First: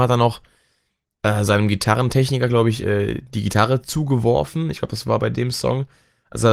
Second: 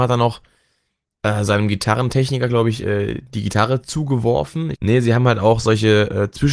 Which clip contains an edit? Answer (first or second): second